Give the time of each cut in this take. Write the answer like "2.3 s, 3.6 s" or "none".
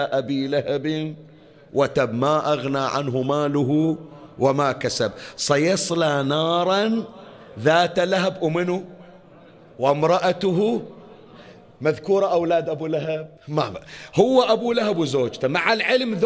13.4 s